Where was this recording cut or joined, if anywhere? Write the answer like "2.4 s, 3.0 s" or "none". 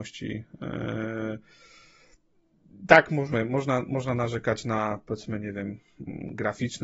none